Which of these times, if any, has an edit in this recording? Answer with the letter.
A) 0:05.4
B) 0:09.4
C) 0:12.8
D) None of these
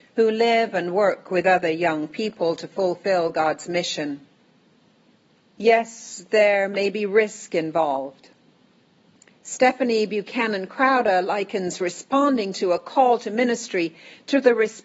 A